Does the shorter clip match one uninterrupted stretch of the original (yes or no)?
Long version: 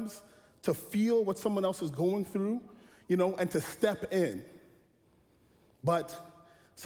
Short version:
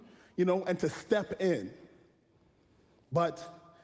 yes